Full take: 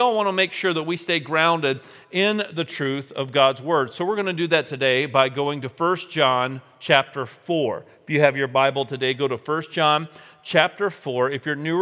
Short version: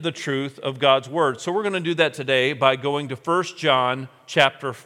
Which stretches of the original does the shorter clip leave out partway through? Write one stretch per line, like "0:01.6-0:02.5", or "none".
none